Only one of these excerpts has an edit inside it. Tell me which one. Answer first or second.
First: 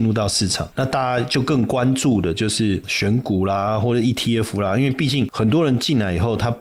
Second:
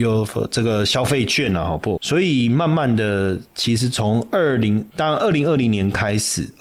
second